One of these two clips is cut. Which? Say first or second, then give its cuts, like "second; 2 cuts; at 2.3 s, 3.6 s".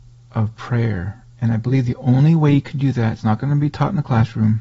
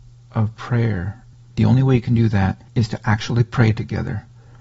second; 2 cuts; at 1.3 s, 2.7 s